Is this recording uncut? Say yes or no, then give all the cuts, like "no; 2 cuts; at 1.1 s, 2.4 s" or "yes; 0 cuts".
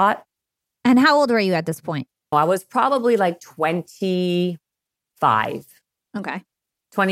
no; 1 cut; at 2.3 s